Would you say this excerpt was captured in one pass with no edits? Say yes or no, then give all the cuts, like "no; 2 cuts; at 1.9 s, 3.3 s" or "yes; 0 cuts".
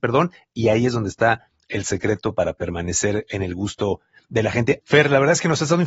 no; 1 cut; at 4.8 s